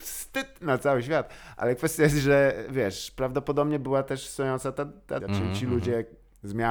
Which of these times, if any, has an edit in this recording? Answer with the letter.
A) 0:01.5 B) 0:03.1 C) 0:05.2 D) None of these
C